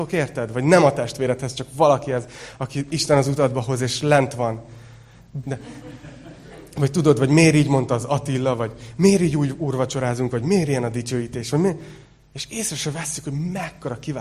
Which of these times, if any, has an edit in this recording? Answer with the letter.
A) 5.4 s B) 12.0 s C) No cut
A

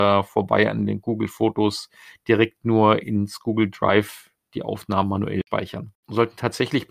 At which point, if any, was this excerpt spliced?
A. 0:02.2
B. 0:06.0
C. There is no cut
B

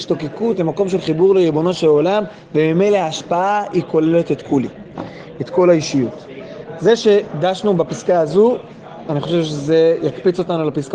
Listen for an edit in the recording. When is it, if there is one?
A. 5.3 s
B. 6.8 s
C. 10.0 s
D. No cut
D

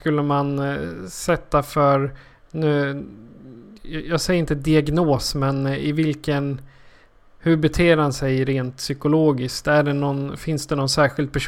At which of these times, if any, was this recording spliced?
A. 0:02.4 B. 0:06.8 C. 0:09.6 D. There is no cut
D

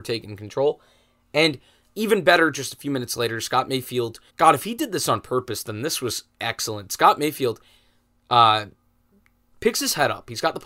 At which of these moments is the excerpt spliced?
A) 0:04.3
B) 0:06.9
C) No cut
A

